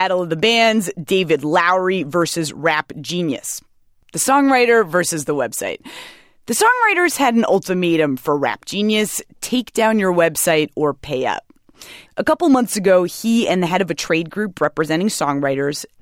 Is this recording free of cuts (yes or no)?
no